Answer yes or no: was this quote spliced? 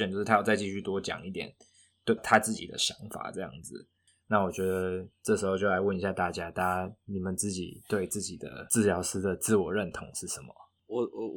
yes